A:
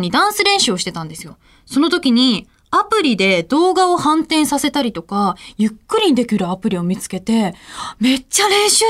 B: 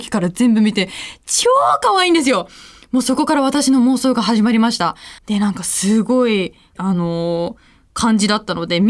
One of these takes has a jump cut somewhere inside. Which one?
B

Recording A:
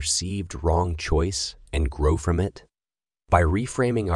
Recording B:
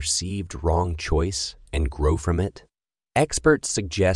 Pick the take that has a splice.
A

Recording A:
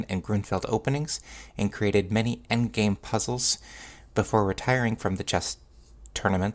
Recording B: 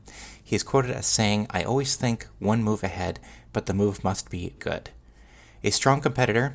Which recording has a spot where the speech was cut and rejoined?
B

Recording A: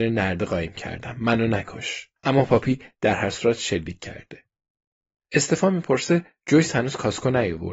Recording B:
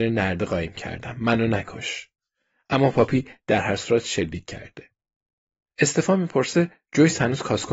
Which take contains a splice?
A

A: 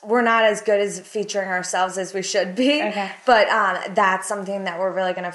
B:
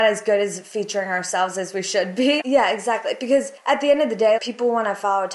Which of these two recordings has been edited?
B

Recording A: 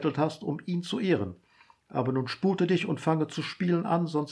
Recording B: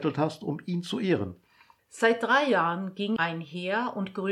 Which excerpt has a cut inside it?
B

